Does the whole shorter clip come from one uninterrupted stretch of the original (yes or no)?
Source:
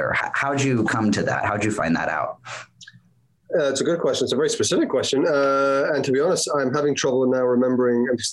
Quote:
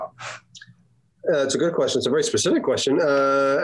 yes